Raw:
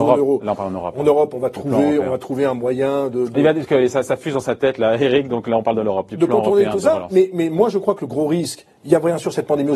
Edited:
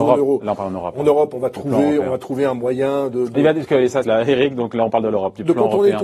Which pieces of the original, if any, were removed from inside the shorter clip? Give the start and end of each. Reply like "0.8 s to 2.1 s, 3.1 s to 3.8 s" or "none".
4.0 s to 4.8 s